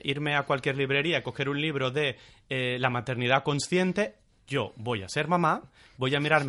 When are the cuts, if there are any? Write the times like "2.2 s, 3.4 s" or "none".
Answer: none

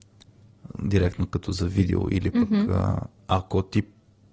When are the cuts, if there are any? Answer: 3.2 s

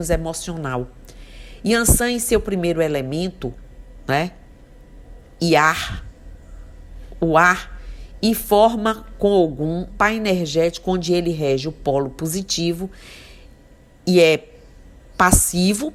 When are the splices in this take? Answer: 9.9 s

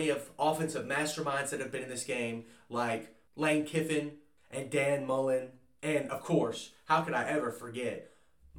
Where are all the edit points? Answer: none

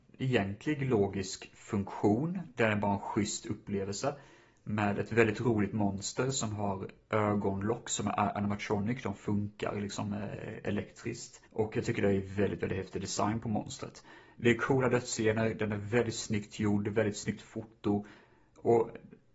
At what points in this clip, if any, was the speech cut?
11.5 s

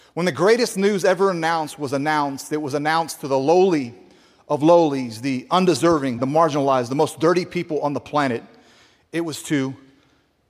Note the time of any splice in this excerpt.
6.2 s

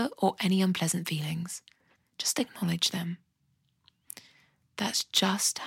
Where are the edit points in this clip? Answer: 2.0 s

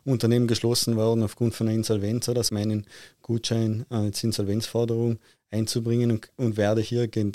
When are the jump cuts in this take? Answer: 2.5 s

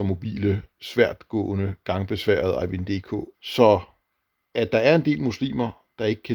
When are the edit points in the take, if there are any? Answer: 3.3 s

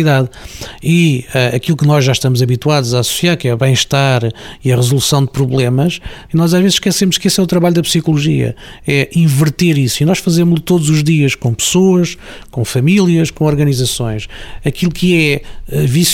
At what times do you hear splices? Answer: 6.3 s

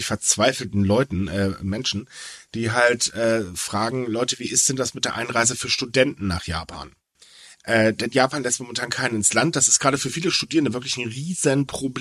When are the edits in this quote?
none

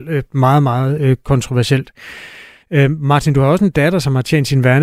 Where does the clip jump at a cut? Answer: 2.6 s

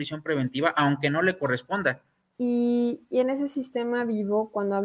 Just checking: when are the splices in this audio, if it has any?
2.3 s

